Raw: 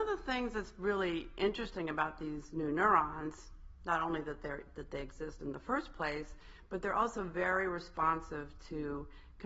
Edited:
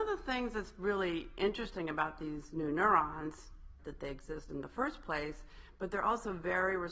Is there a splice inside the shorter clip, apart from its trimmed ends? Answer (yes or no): yes